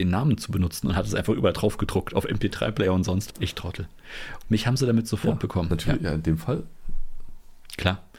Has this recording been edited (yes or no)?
yes